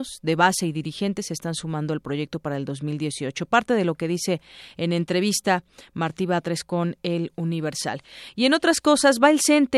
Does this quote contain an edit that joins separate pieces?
no; 0 cuts

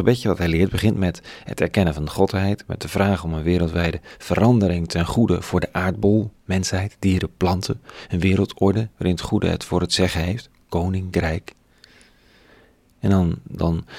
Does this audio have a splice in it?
no; 0 cuts

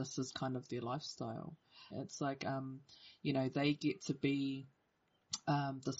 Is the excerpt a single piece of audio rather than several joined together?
no; 1 cut; at 1.9 s

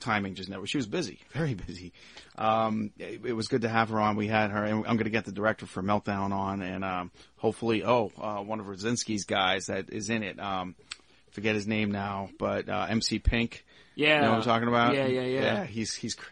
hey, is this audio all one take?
yes; 0 cuts

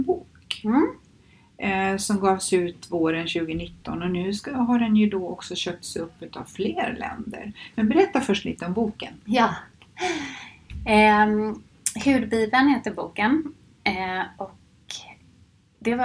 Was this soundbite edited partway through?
no; 0 cuts

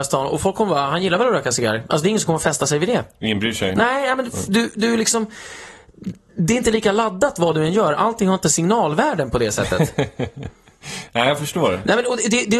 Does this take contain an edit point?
no; 0 cuts

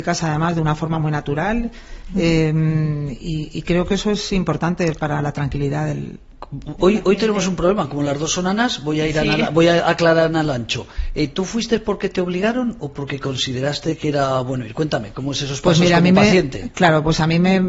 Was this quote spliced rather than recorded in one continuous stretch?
no; 0 cuts

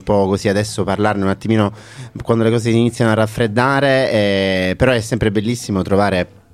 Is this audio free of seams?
yes; 0 cuts

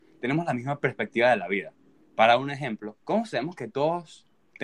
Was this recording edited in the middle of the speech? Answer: yes; 1 cut; at 3.0 s

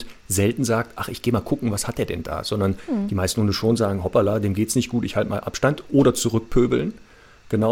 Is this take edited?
no; 0 cuts

